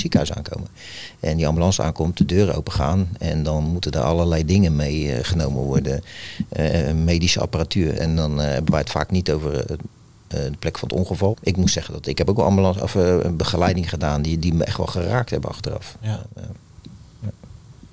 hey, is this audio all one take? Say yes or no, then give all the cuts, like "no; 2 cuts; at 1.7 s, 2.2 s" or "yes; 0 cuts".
no; 2 cuts; at 8.0 s, 11.3 s